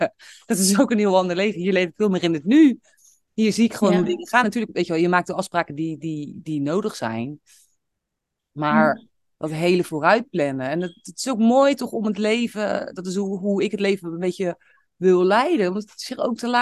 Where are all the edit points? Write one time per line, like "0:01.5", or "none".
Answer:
none